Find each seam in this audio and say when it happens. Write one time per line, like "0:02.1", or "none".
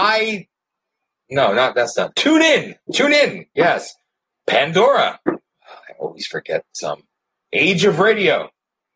0:05.5